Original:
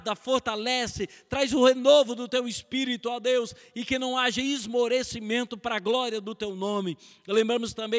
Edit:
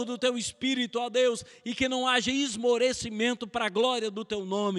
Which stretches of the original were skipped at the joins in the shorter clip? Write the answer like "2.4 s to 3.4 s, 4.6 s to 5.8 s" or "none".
none